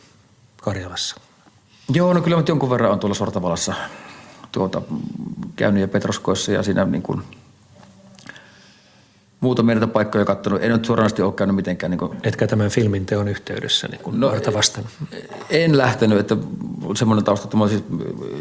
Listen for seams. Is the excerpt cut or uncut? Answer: cut